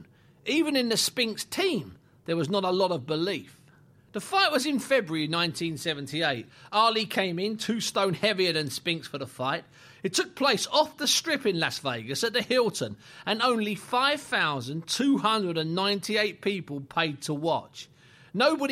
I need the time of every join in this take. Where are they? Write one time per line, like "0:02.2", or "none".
none